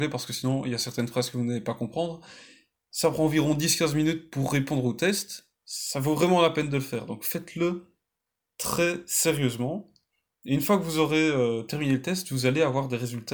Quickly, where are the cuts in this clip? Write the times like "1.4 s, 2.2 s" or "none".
none